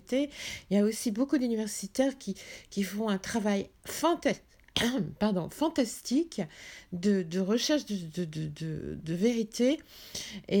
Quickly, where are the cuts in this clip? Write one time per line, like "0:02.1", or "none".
none